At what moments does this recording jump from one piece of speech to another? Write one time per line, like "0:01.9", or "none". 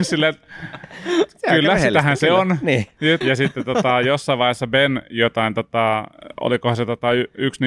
0:03.2